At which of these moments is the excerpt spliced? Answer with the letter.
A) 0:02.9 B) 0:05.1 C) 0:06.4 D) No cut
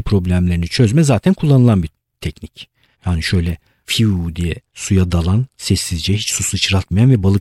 A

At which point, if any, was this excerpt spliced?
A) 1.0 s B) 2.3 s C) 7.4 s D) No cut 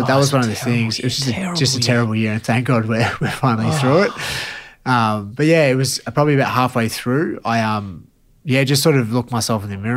D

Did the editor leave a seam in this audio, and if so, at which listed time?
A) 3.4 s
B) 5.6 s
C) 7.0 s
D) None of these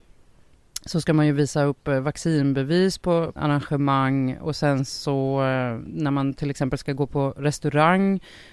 A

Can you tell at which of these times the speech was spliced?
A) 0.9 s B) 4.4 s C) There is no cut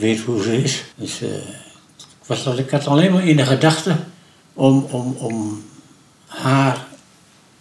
A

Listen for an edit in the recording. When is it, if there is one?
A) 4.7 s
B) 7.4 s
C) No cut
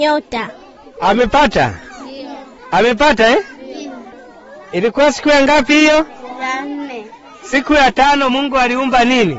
C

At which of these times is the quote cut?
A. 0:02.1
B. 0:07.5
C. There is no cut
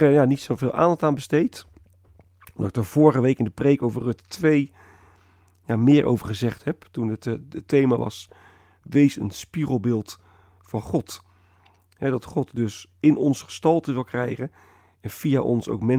C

